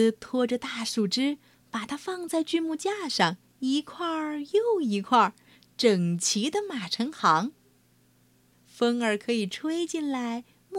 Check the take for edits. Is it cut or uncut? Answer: cut